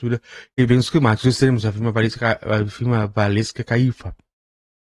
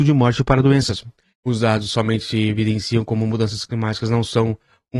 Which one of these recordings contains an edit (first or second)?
second